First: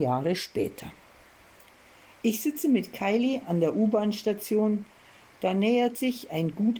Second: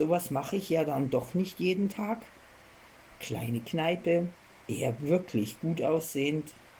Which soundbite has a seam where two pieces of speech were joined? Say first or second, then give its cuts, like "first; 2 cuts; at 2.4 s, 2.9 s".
second; 1 cut; at 4.5 s